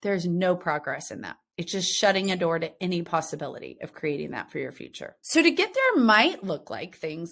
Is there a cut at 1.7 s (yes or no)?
no